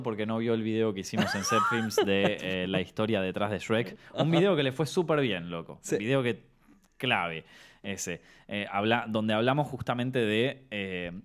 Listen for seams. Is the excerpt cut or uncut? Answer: uncut